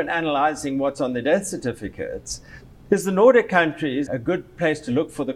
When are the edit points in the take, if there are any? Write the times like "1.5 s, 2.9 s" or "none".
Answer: 2.7 s, 4.1 s